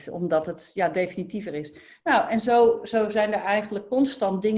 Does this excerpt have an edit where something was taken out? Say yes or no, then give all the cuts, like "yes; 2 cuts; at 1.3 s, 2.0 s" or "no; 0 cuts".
no; 0 cuts